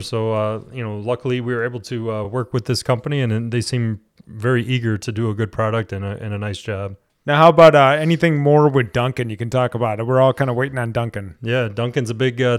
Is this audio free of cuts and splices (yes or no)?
yes